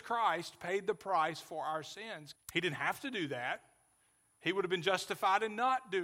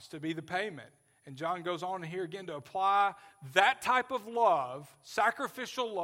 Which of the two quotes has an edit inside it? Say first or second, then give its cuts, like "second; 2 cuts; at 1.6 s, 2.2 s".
first; 1 cut; at 2.4 s